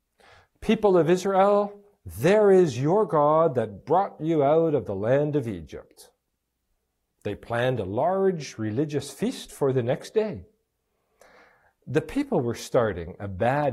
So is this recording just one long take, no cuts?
yes; 0 cuts

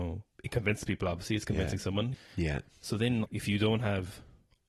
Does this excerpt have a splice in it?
yes; 2 cuts; at 2.1 s, 3.2 s

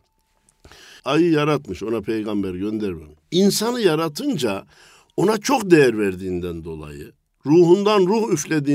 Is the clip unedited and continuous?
no; 1 cut; at 1.0 s

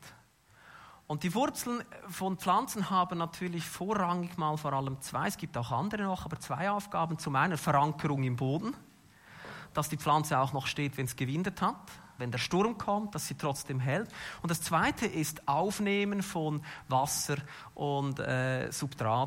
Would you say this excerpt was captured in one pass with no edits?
no; 1 cut; at 12.2 s

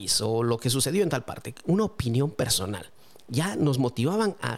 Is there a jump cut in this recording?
no; 0 cuts

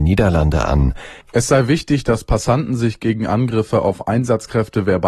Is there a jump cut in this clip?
yes; 1 cut; at 1.2 s

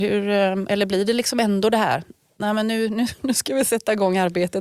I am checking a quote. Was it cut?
no; 0 cuts

